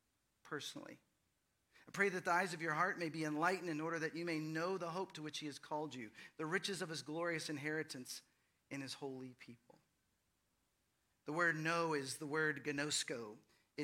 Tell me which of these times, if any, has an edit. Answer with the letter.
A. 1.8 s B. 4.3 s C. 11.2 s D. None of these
D